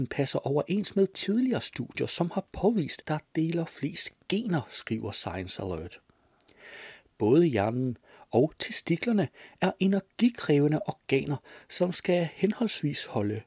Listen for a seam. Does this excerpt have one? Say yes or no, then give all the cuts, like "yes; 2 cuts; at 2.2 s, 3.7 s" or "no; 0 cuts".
yes; 1 cut; at 3.0 s